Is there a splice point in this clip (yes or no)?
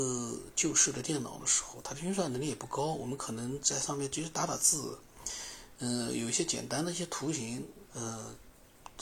yes